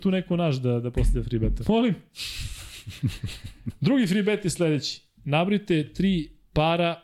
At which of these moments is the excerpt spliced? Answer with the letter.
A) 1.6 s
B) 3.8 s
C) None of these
A